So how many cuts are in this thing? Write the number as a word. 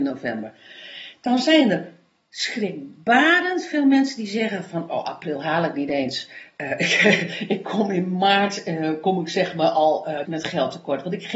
one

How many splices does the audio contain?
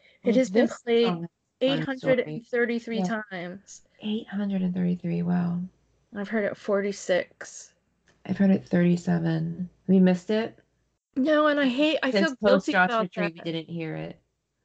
zero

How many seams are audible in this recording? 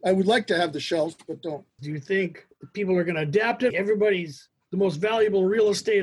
two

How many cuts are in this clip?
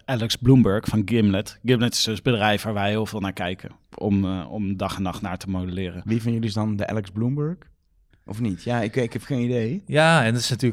one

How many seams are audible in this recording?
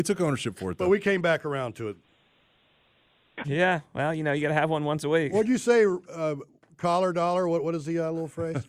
one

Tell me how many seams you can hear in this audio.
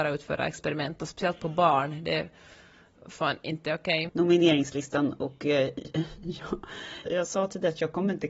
two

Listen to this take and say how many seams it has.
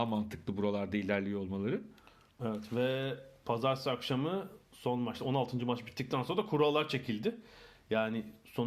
one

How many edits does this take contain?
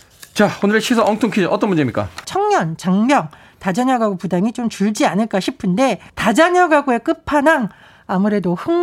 two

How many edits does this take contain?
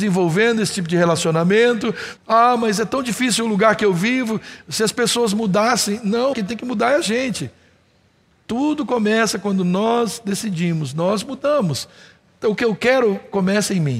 two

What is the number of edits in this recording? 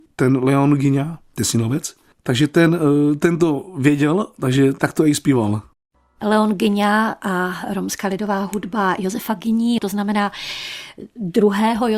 one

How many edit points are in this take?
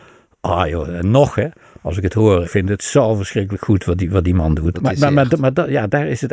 two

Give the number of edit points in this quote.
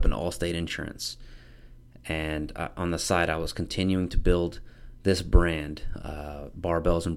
zero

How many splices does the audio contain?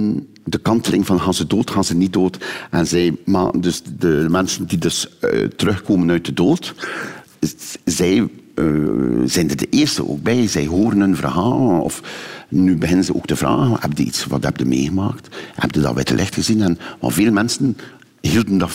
zero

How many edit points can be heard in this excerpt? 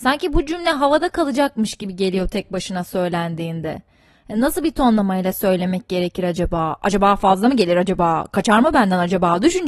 zero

